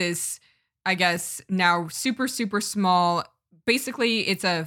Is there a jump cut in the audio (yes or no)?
no